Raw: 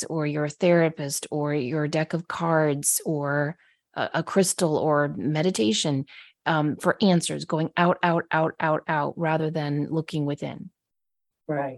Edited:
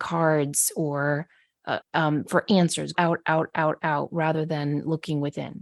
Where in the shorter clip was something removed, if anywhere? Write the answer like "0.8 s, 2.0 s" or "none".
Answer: 1.8 s, 2.9 s